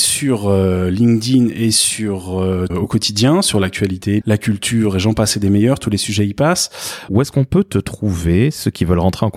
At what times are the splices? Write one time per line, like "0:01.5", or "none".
0:02.7
0:04.2
0:07.1